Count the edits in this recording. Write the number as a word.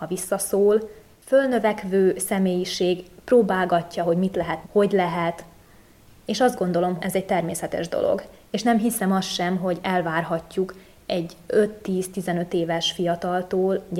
two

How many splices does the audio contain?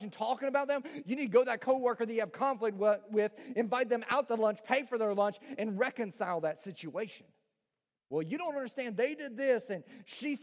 one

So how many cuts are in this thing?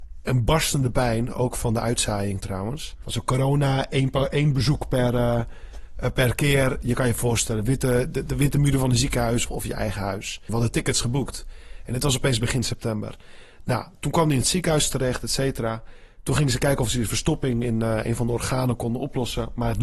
three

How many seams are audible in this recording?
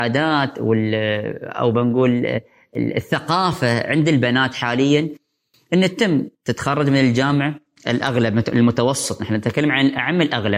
one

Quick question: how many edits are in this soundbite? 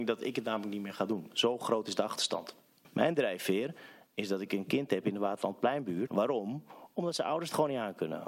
one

